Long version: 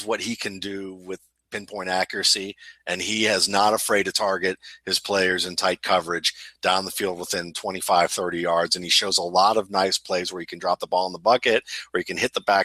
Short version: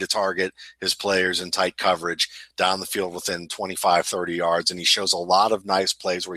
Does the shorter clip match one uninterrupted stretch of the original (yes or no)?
yes